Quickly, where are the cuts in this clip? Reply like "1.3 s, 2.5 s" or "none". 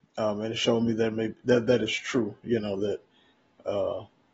none

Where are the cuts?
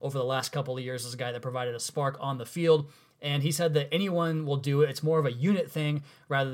none

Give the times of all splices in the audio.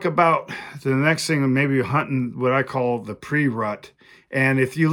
none

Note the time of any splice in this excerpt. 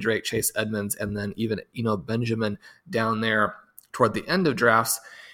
none

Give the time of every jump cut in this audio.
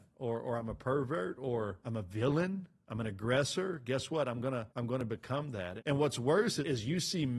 4.7 s

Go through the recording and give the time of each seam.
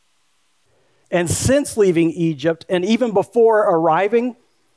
1.0 s

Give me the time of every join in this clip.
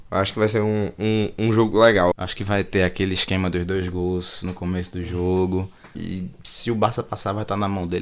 2.1 s, 5.9 s

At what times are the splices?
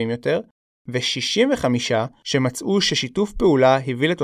none

